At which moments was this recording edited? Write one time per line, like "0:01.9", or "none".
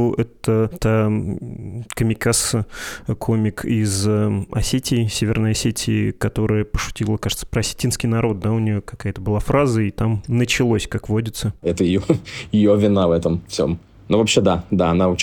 0:11.6